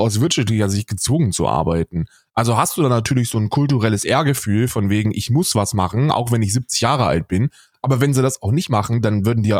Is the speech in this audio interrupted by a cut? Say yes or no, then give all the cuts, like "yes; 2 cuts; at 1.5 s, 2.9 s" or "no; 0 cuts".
no; 0 cuts